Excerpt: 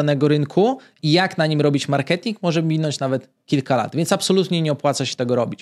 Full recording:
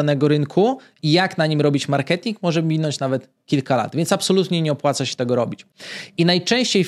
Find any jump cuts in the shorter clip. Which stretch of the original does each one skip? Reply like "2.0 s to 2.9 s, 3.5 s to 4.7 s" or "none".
none